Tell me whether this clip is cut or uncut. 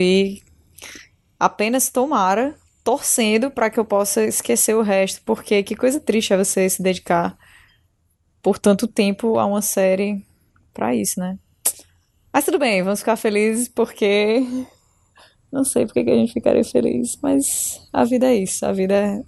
uncut